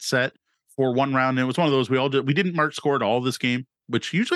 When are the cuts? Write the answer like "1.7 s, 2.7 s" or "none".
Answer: none